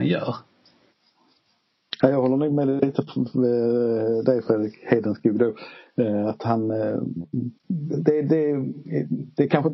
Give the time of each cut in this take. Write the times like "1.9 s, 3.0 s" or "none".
7.6 s

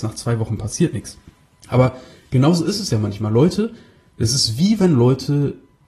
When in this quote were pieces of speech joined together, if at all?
1.6 s

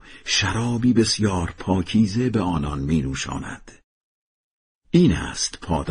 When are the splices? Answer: none

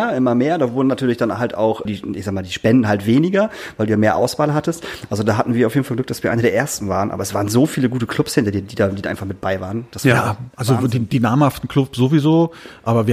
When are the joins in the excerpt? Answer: 1.9 s

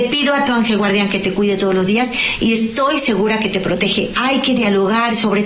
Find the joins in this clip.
4.1 s

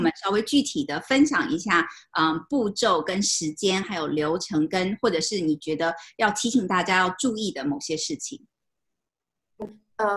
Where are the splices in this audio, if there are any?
none

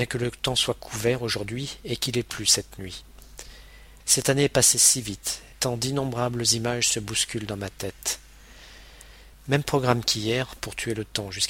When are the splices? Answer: 4.0 s, 5.5 s, 9.3 s

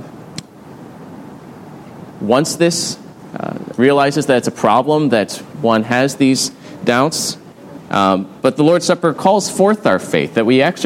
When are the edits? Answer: 3.7 s, 7.8 s

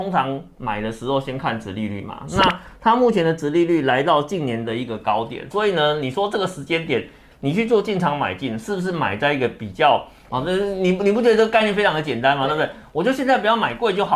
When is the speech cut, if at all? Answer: 10.3 s

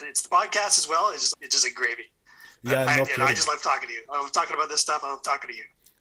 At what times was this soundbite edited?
1.3 s

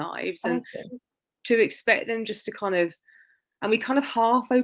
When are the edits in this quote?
none

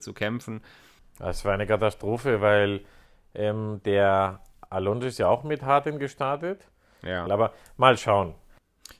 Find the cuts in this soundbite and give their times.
1.0 s, 7.3 s

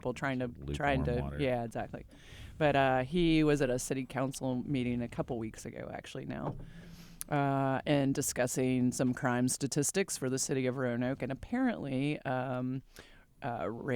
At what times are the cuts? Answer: none

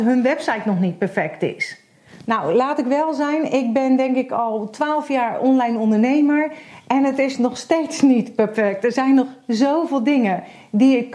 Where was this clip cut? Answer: none

